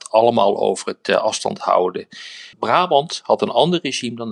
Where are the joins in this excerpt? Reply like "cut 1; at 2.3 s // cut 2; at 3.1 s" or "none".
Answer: cut 1; at 2.5 s